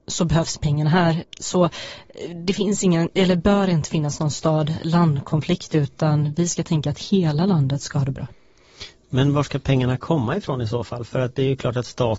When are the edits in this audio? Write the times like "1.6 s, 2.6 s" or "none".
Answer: none